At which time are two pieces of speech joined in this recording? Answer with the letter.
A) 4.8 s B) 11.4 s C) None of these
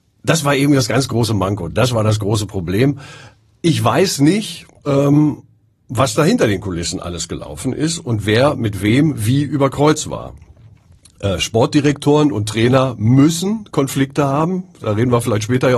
C